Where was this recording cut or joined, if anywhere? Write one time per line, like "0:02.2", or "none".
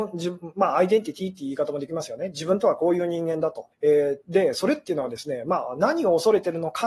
0:03.7